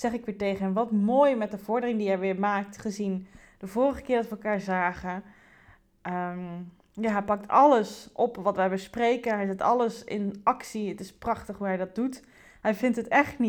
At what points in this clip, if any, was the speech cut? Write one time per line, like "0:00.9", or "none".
none